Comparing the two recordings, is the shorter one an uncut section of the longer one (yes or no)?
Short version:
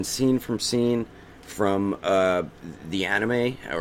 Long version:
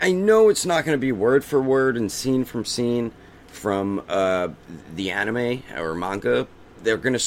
yes